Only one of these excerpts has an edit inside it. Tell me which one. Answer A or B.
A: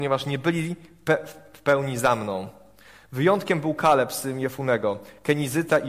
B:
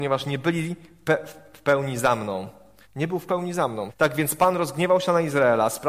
B